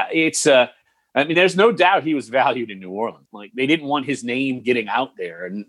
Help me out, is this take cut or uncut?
cut